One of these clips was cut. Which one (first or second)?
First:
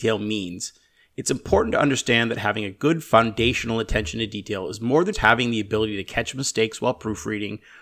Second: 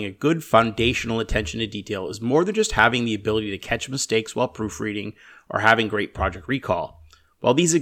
first